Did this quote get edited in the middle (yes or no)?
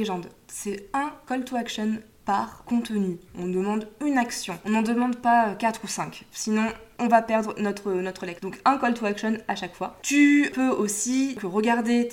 yes